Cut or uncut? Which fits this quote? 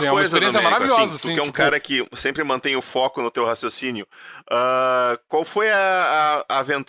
uncut